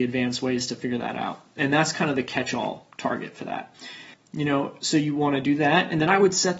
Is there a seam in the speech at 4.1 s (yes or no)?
yes